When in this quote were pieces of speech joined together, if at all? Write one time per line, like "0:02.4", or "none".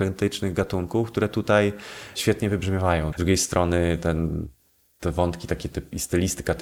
0:03.1